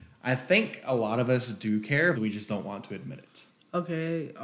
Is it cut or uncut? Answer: cut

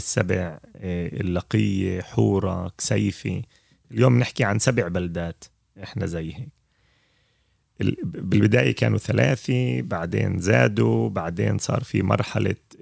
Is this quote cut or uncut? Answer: uncut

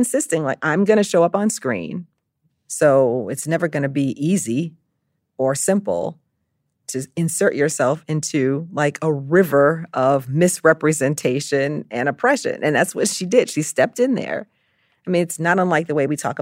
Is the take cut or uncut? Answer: cut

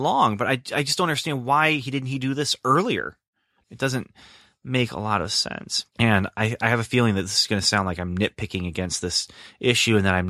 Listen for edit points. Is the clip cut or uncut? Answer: cut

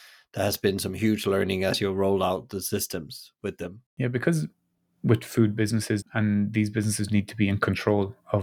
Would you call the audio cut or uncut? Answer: cut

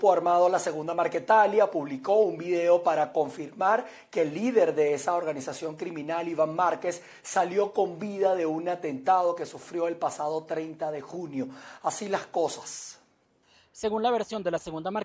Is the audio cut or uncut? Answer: uncut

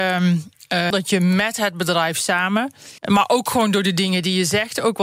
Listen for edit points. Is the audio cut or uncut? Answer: cut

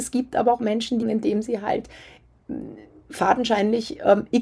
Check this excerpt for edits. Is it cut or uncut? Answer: cut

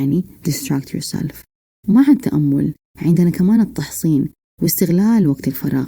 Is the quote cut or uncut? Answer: uncut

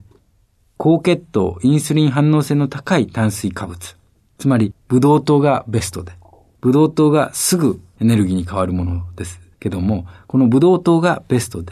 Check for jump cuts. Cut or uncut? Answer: uncut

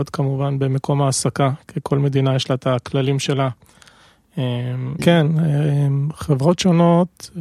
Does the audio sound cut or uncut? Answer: cut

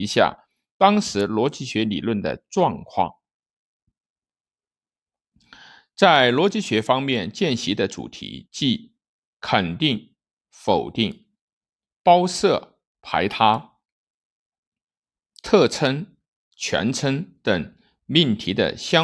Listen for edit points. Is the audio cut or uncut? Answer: cut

